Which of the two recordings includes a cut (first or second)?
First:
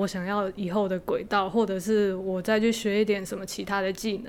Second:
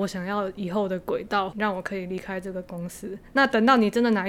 second